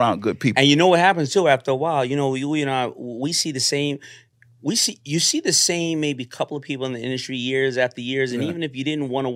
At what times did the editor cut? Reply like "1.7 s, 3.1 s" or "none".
none